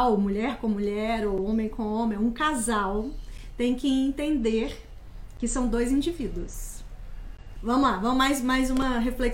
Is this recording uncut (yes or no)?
no